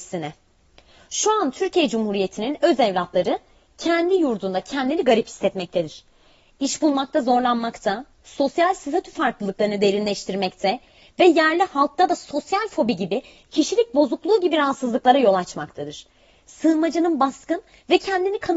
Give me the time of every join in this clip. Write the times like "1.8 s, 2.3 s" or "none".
none